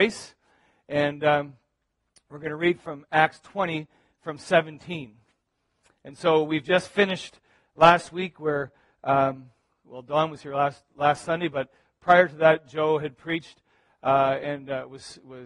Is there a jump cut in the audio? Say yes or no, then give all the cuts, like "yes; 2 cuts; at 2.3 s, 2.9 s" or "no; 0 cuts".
no; 0 cuts